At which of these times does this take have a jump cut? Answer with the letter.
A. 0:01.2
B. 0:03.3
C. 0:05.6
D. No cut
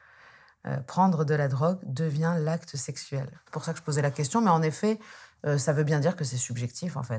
B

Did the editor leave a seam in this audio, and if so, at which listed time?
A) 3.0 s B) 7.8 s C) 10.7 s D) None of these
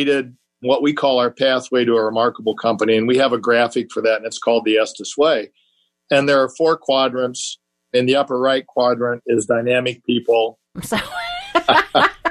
C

